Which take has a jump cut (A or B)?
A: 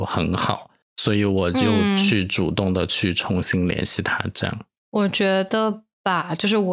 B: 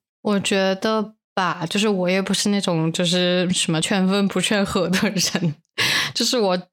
B